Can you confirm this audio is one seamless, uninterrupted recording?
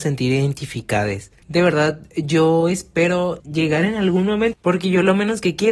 no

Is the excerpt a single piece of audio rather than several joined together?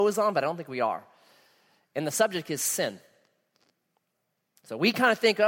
yes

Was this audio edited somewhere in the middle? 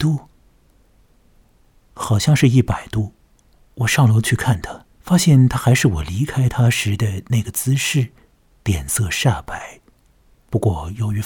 yes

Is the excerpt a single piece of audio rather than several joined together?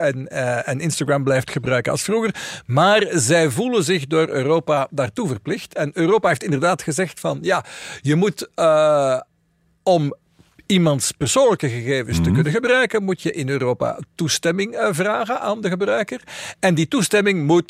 yes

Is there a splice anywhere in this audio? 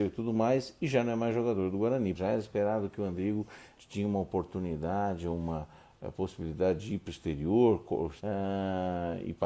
yes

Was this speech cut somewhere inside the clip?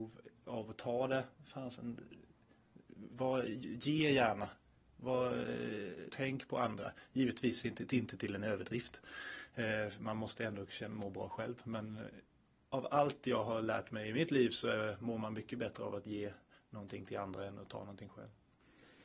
yes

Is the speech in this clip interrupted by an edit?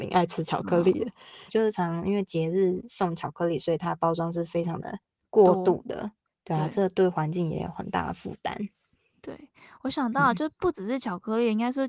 yes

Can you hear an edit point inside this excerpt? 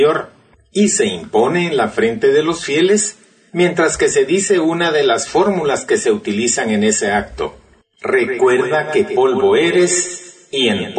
no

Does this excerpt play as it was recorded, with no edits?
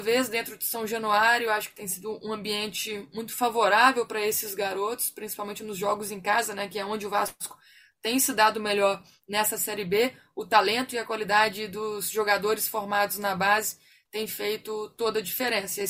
yes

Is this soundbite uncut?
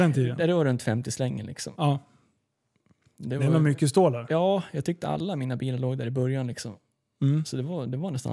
yes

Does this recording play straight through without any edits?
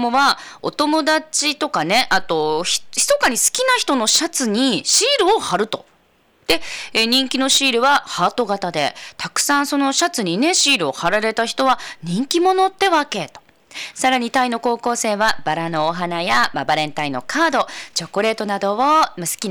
yes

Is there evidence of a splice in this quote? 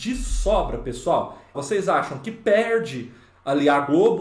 yes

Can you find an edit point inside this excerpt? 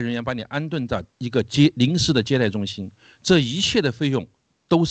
no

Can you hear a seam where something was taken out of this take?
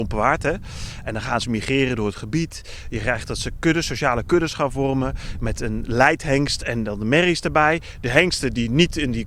no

